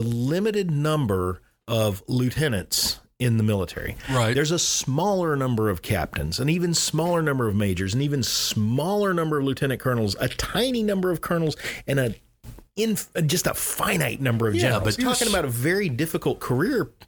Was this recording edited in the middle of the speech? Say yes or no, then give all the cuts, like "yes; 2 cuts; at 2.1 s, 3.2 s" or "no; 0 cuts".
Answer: yes; 1 cut; at 15.0 s